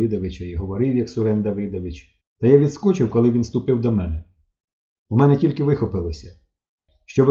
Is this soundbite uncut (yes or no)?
yes